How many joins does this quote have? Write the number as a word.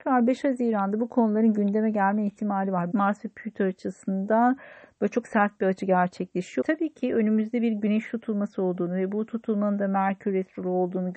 two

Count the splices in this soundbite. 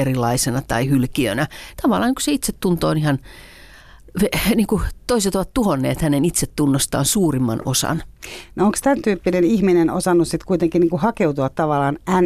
one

